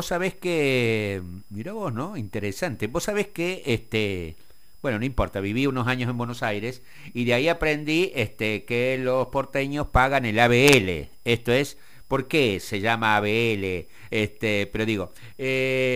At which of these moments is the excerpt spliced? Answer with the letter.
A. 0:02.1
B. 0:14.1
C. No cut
B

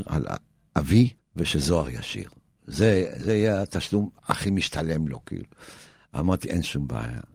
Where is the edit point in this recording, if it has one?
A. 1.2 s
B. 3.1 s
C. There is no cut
A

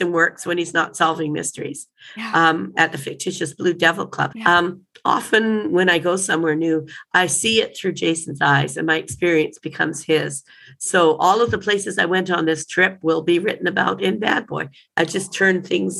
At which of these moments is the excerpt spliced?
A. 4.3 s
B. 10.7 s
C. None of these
A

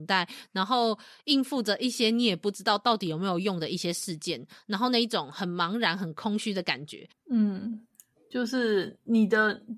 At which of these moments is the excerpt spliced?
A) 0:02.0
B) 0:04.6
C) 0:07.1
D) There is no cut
C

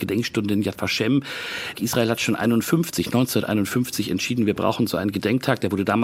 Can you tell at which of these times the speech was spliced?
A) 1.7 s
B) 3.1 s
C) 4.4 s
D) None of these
A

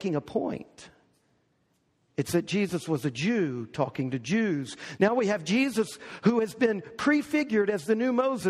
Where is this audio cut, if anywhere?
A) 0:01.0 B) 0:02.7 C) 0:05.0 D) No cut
C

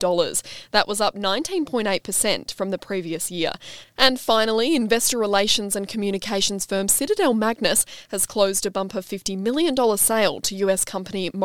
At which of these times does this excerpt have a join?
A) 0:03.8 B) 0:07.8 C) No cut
A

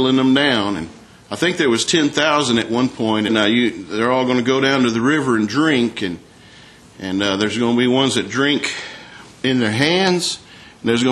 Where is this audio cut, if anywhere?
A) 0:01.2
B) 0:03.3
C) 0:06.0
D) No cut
B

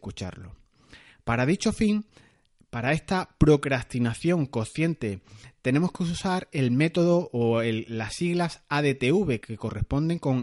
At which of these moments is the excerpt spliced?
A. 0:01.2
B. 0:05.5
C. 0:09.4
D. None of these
C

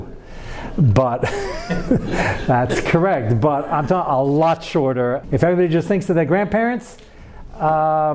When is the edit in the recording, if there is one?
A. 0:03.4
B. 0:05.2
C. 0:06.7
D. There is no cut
B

